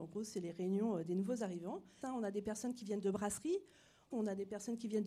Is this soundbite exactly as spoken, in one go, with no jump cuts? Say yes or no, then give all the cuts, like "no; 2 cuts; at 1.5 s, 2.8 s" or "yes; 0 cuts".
no; 2 cuts; at 2.0 s, 4.1 s